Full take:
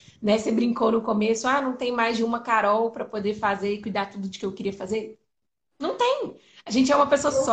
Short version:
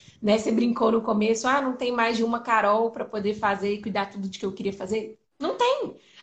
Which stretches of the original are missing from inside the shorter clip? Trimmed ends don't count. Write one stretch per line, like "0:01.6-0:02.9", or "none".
0:05.3-0:05.7